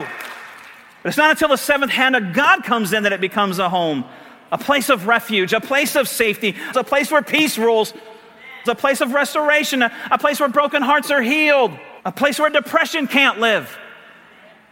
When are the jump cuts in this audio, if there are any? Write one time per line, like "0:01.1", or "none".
0:06.7
0:08.6
0:12.0